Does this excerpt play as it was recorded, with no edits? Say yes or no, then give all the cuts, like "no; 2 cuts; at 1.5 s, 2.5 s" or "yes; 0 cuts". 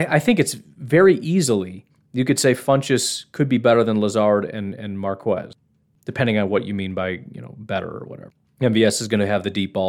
yes; 0 cuts